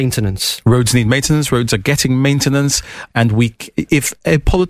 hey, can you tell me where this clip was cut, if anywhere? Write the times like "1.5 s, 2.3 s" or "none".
3.1 s